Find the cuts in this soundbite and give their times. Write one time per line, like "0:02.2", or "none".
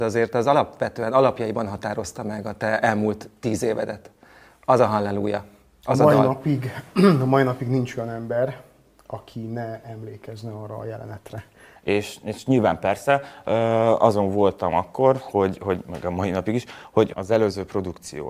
0:11.8
0:17.1